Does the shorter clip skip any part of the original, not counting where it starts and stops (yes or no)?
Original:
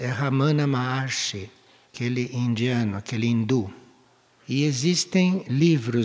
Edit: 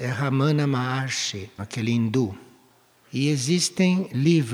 yes